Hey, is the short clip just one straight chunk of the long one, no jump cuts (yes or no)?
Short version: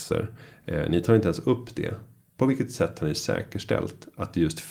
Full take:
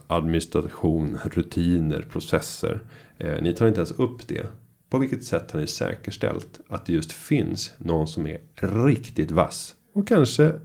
yes